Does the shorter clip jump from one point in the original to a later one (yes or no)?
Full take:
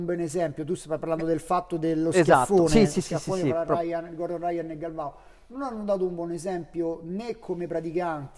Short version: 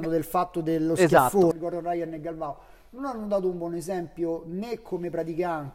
yes